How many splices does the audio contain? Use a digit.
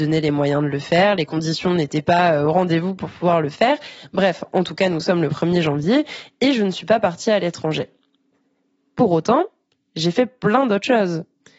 0